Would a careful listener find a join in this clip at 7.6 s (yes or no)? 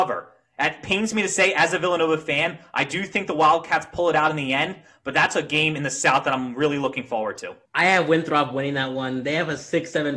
yes